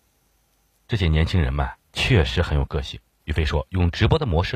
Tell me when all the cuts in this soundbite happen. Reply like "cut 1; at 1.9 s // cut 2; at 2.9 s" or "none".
cut 1; at 3.2 s